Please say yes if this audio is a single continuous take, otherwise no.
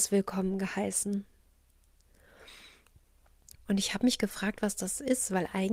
no